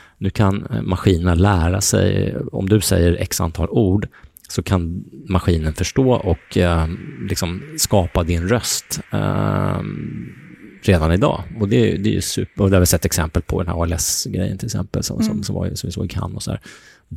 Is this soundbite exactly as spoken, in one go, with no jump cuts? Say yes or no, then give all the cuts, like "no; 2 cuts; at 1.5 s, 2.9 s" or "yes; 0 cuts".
yes; 0 cuts